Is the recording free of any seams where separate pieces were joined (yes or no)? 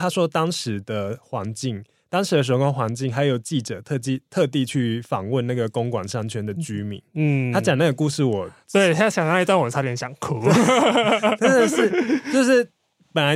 yes